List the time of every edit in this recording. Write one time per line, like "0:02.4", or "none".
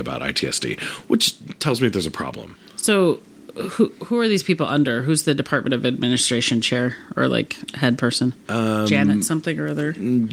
none